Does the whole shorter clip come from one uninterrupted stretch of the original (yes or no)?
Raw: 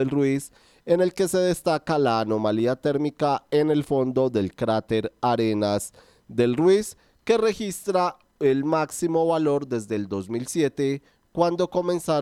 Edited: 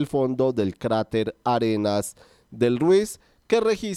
yes